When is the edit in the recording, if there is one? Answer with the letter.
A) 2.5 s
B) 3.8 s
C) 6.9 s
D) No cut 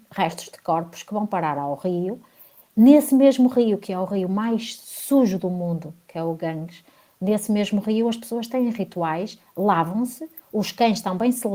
D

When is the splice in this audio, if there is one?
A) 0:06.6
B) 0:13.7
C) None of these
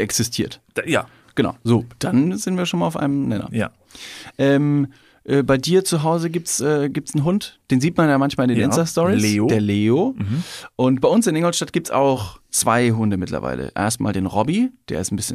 C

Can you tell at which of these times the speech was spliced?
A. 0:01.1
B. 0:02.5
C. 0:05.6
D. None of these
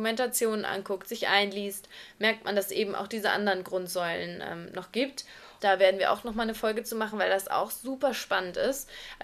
C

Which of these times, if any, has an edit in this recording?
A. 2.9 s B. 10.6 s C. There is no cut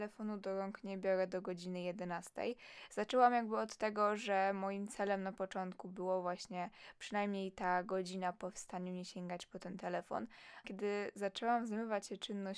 B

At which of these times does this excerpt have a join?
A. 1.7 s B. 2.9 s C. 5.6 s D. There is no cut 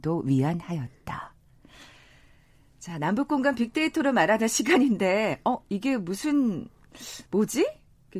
D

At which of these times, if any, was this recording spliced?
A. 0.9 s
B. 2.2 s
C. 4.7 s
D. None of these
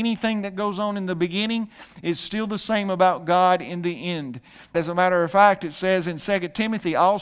C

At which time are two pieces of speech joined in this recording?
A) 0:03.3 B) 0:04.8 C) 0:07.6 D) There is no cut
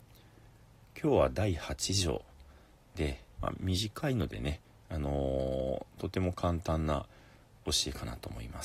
A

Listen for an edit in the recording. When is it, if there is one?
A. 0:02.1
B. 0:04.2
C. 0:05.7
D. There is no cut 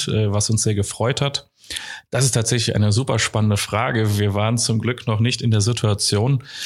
A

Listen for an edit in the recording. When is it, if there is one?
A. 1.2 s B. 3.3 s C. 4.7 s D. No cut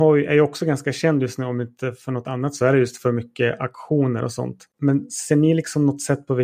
C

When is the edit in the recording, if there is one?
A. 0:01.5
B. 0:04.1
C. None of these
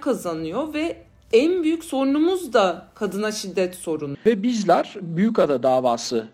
B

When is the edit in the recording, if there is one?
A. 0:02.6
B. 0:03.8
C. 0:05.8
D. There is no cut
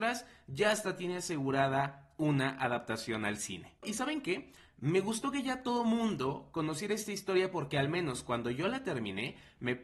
B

